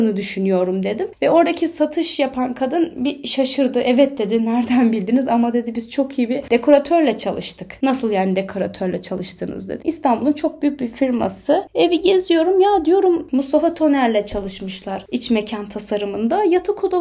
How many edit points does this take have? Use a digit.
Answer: 1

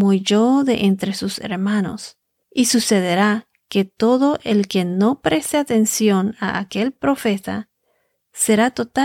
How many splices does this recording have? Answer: 1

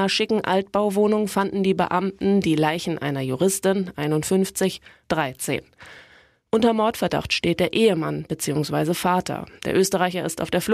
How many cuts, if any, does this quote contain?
1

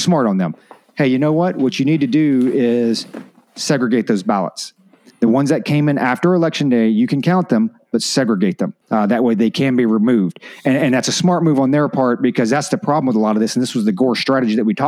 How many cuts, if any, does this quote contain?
1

